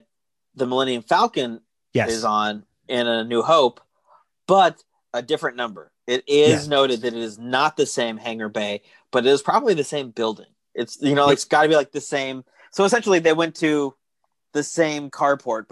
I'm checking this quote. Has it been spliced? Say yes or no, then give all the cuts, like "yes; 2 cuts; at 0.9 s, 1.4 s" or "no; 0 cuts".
no; 0 cuts